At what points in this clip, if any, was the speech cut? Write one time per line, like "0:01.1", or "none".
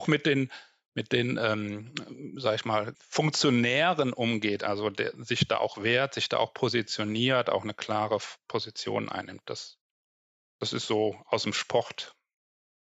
0:02.9